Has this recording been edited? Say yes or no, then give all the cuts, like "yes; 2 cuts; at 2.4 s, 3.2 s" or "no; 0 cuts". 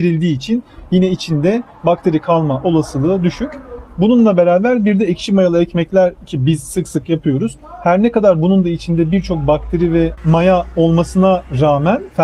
no; 0 cuts